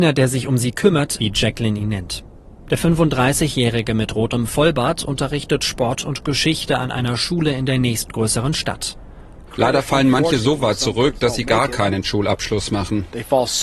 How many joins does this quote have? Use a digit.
2